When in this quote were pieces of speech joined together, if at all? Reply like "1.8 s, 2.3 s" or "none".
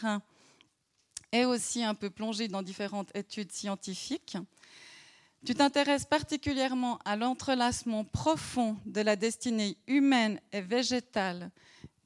none